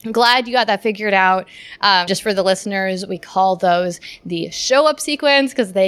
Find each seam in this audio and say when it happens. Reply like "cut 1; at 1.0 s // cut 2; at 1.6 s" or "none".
cut 1; at 2.1 s